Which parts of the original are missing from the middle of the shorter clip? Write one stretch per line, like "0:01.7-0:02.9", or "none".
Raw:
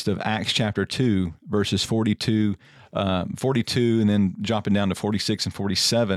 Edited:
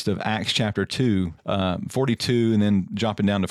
0:01.4-0:02.8